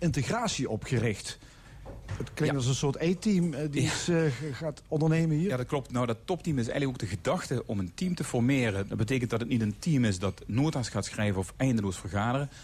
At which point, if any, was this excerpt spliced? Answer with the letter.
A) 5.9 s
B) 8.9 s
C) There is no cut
B